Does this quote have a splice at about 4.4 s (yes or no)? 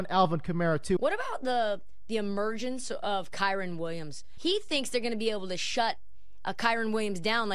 yes